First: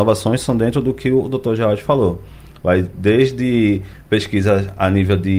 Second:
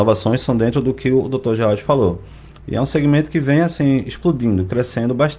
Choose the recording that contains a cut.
second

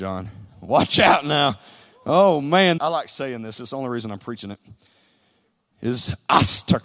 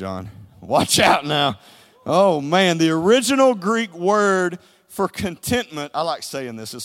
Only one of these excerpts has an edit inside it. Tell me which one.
first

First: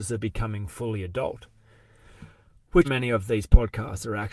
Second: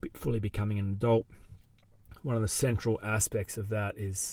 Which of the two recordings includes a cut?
first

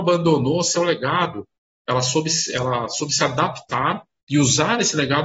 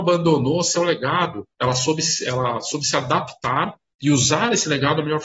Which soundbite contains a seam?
second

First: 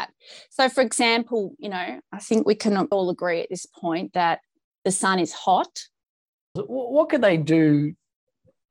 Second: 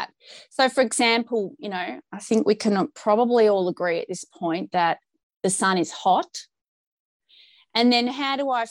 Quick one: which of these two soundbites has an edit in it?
first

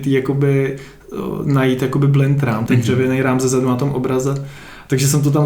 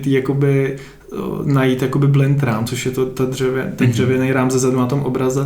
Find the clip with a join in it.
first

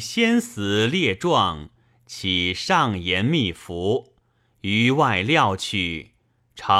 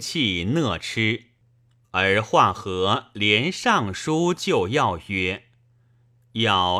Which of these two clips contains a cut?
second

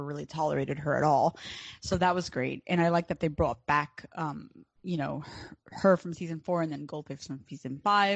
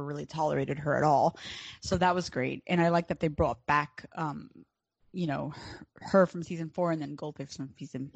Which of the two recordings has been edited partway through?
first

